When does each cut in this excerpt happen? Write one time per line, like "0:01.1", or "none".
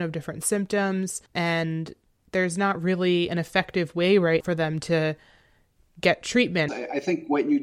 0:01.3
0:04.4
0:06.7